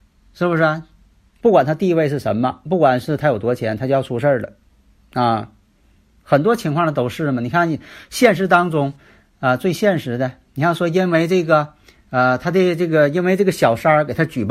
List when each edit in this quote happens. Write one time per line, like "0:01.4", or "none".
0:01.4